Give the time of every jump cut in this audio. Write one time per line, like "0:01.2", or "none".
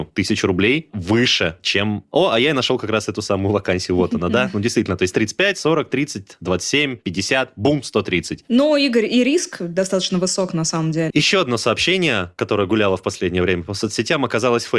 0:11.1